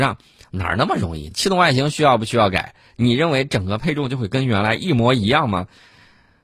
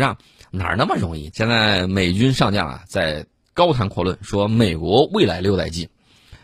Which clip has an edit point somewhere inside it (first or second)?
second